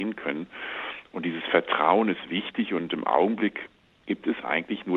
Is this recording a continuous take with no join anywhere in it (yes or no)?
yes